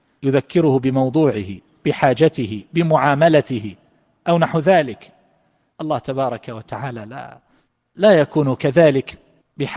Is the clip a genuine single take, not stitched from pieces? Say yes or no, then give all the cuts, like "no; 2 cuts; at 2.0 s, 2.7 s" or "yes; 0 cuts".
yes; 0 cuts